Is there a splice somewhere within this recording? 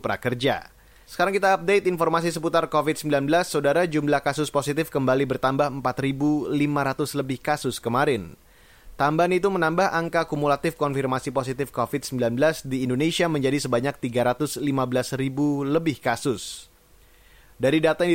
yes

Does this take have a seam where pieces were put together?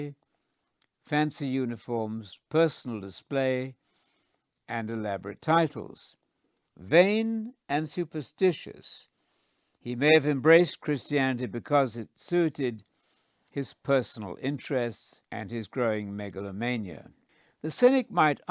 yes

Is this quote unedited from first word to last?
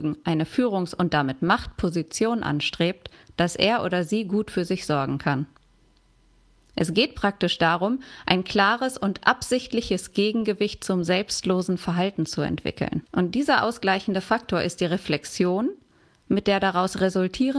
no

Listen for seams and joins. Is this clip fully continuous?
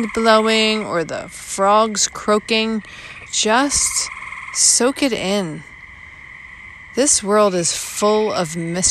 no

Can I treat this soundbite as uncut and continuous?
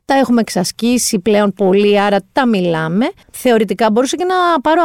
no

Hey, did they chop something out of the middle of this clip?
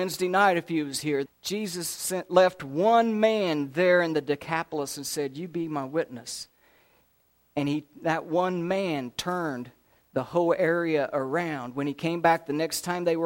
yes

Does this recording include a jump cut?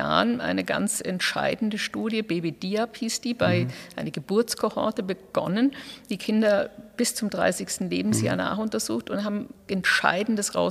yes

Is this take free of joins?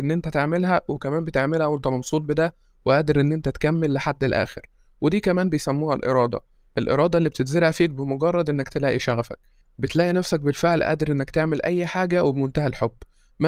yes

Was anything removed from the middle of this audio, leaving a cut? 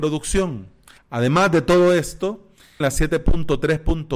yes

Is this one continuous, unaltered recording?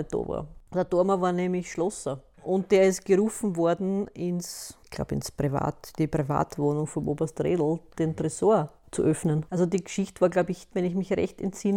no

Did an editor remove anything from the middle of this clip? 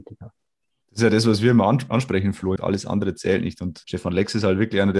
yes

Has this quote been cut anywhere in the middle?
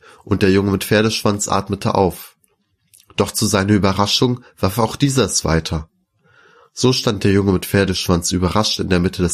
no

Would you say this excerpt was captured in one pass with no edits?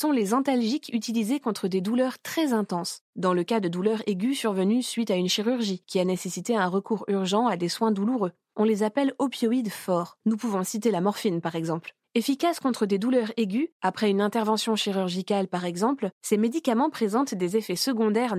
yes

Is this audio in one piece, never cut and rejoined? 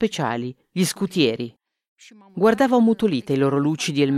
yes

